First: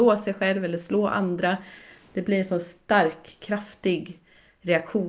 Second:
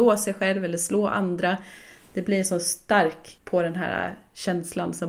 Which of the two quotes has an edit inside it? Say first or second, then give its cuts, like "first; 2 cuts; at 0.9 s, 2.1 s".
second; 1 cut; at 3.4 s